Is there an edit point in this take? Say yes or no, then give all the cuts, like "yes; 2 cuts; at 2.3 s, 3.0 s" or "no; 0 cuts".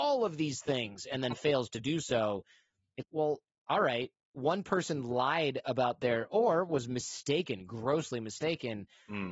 yes; 1 cut; at 3.0 s